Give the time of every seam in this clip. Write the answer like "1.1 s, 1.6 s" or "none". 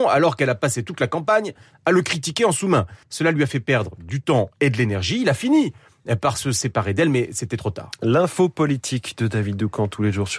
3.0 s